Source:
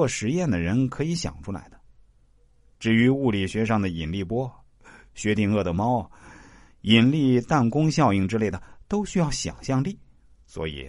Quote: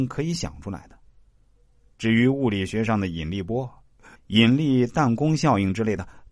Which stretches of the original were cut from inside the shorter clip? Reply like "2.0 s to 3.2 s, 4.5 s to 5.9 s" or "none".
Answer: 5.0 s to 6.7 s